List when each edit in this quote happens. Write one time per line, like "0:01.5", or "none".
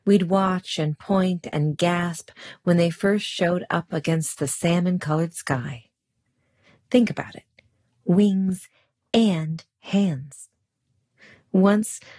0:06.8